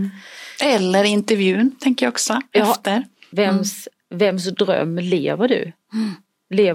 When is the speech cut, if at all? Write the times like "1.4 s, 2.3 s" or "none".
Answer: 3.3 s